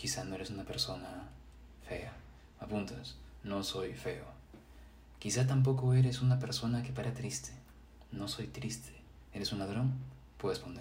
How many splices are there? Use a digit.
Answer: 0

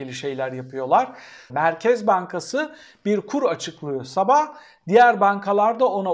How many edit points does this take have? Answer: 1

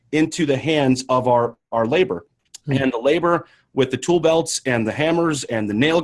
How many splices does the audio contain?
0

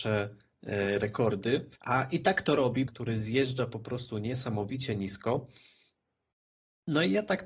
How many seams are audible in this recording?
2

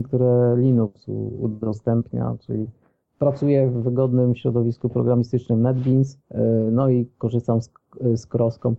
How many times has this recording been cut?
1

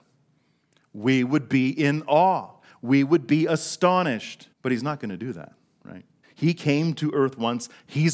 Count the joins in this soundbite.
2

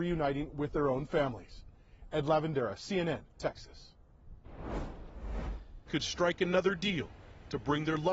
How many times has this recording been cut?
2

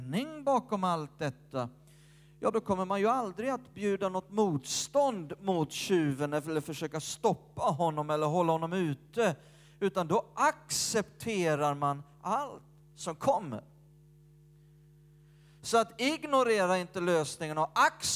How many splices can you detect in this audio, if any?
1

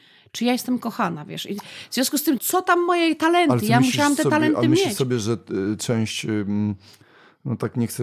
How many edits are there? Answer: 1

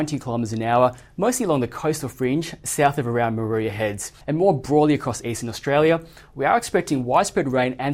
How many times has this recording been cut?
1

